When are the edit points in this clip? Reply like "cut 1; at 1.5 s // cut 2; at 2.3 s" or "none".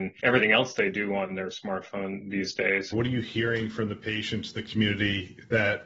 cut 1; at 2.9 s